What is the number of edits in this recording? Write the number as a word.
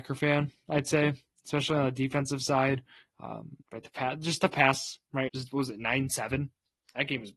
two